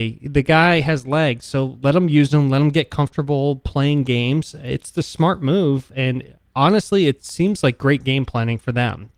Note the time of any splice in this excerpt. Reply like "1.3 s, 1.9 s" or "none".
none